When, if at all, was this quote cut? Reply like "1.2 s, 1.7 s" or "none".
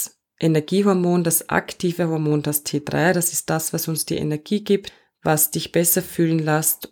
none